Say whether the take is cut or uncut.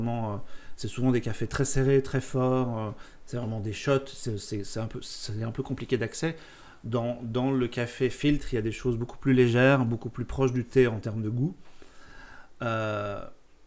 uncut